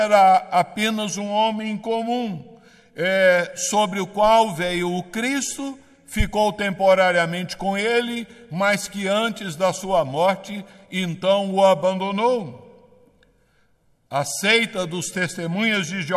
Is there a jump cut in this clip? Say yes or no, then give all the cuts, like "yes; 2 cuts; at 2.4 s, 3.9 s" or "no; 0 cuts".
no; 0 cuts